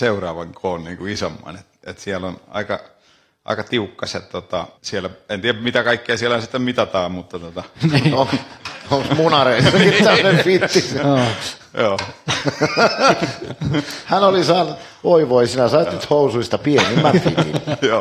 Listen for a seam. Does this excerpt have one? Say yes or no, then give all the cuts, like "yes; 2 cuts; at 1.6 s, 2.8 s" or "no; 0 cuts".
yes; 1 cut; at 4.8 s